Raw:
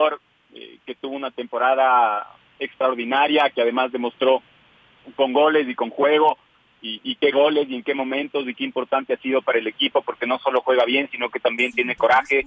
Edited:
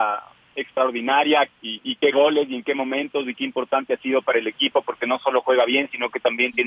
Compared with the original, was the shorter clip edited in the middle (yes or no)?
yes